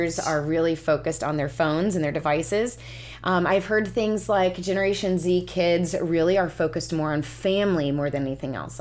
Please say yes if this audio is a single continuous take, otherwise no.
yes